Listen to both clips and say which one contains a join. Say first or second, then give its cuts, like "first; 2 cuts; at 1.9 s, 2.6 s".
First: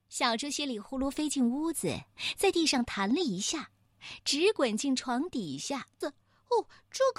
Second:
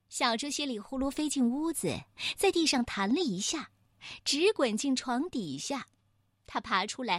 first; 1 cut; at 6.0 s